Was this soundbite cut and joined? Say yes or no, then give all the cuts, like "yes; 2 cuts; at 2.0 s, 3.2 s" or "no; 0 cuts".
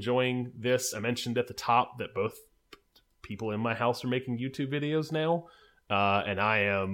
no; 0 cuts